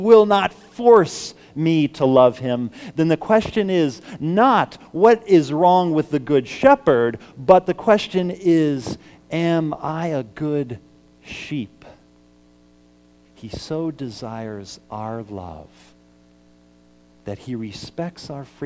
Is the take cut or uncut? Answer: cut